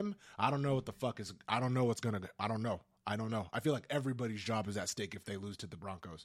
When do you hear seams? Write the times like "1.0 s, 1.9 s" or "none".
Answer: none